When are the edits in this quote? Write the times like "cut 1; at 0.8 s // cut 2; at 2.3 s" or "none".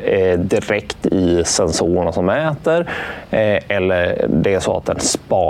none